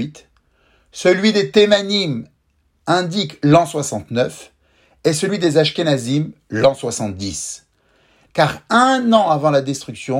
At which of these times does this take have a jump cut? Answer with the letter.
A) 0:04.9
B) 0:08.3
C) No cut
B